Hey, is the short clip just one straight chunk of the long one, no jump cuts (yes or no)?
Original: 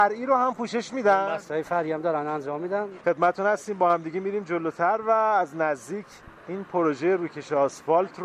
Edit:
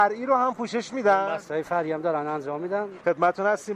yes